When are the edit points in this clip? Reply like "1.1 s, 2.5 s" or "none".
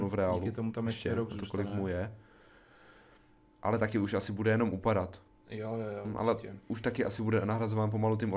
none